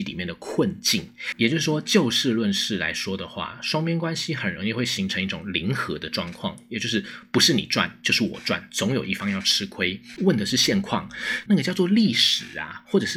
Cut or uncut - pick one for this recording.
cut